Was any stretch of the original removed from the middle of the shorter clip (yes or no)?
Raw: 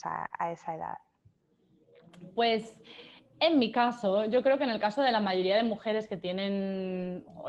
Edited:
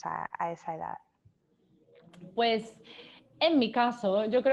no